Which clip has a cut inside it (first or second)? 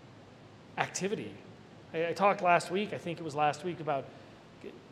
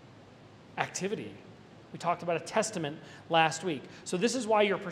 second